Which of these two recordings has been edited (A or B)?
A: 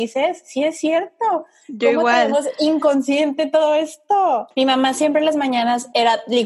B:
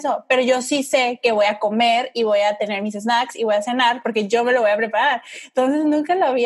A